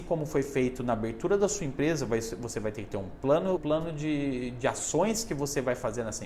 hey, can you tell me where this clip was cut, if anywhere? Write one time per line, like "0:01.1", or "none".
0:03.6